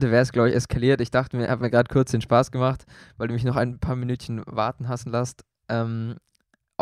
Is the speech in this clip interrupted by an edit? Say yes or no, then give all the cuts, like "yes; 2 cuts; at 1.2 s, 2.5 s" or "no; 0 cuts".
no; 0 cuts